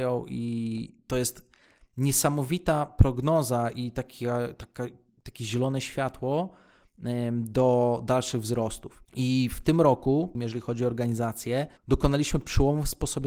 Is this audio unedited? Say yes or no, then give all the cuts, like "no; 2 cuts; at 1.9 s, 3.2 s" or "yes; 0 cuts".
no; 3 cuts; at 9.1 s, 10.3 s, 11.8 s